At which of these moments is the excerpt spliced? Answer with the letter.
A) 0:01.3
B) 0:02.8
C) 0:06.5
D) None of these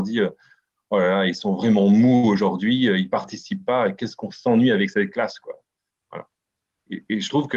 D